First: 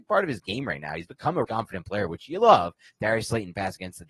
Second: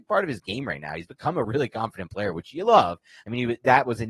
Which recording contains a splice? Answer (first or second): first